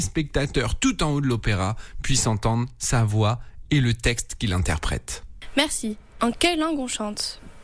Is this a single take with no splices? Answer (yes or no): no